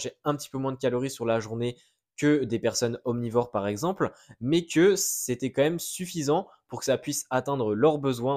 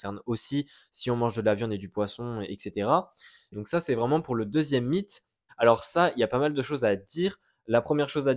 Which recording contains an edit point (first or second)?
second